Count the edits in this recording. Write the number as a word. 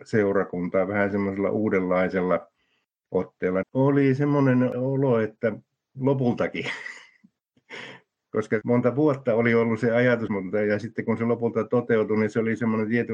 two